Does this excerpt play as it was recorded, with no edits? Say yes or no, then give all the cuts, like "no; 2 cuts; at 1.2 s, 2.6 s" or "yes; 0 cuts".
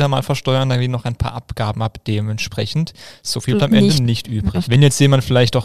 no; 2 cuts; at 3.6 s, 4.6 s